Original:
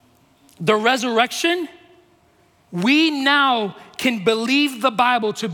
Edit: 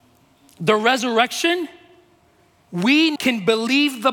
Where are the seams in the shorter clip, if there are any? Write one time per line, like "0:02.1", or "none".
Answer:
0:03.2